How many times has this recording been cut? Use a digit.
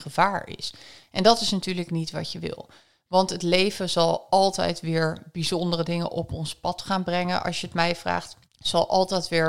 1